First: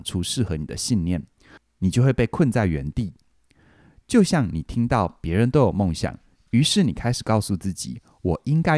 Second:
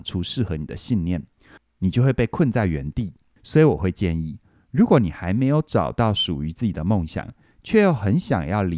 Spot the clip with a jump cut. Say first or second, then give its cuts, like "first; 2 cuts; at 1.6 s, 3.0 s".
second; 1 cut; at 3.4 s